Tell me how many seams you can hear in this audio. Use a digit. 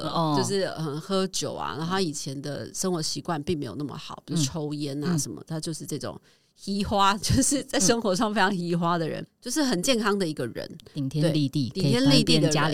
1